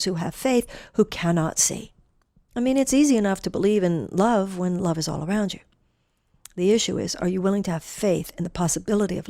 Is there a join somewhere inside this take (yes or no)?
no